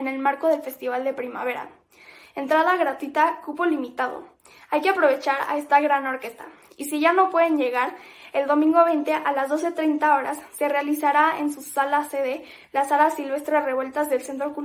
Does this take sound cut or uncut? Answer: uncut